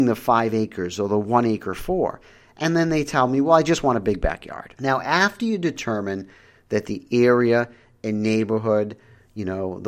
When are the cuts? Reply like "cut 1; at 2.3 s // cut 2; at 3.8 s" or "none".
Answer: cut 1; at 4.8 s